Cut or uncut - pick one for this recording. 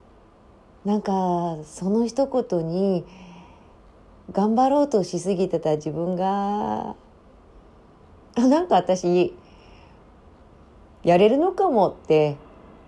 cut